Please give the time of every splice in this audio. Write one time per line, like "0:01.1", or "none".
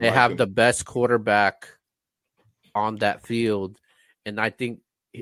none